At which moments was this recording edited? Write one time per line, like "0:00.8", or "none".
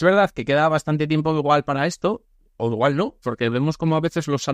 0:03.2